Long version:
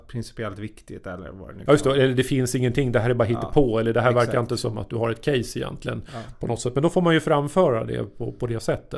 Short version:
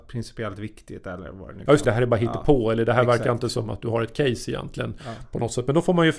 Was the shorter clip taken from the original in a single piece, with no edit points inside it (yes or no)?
no